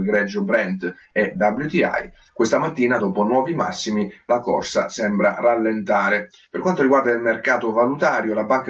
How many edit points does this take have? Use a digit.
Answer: 0